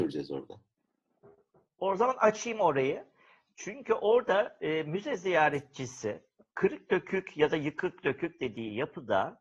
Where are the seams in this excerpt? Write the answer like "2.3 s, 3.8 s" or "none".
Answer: none